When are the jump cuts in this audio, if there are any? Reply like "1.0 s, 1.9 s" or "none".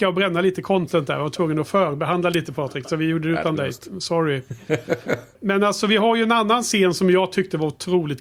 5.3 s